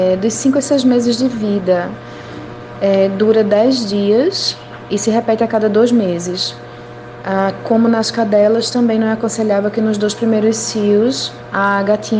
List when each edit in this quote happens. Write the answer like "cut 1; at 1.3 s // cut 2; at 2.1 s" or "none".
none